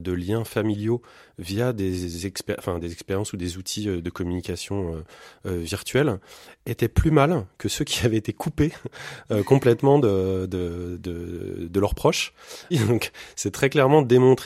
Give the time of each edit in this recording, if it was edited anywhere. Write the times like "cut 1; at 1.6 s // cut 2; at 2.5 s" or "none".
cut 1; at 12.7 s